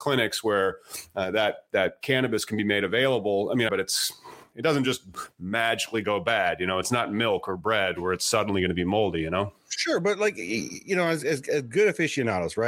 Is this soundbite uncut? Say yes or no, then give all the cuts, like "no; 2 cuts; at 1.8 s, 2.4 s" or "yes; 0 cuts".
no; 1 cut; at 3.7 s